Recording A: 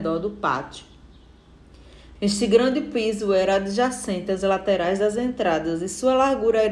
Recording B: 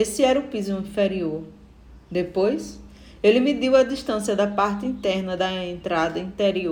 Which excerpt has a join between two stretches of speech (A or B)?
A